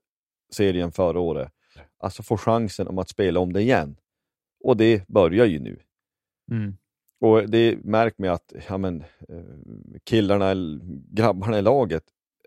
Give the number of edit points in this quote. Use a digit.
1